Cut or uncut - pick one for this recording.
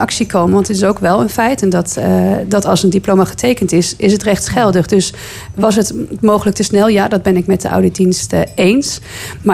uncut